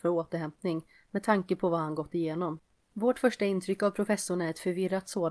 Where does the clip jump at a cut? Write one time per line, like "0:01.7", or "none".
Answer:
0:02.8